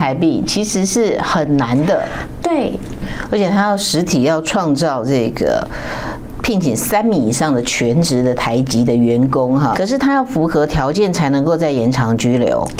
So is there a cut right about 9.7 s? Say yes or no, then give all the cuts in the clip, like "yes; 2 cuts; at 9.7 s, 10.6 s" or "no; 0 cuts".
yes; 1 cut; at 9.7 s